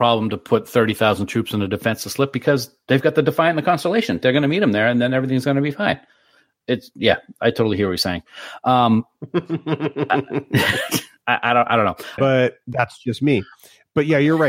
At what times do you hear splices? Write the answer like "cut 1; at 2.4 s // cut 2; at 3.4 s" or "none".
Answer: cut 1; at 12.2 s